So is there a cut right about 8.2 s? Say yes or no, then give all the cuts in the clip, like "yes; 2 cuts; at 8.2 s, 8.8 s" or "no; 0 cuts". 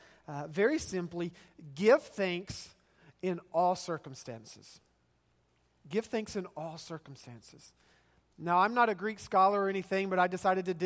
no; 0 cuts